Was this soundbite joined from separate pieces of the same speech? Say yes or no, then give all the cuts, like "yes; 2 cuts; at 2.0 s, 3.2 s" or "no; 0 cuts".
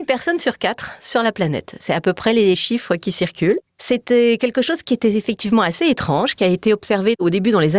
no; 0 cuts